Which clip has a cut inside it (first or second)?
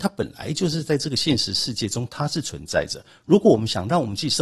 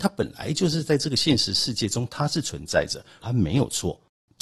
second